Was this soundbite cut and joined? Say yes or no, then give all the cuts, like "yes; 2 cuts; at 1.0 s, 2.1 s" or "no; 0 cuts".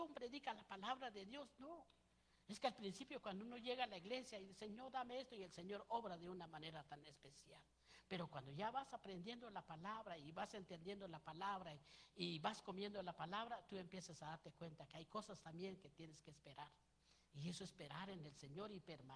no; 0 cuts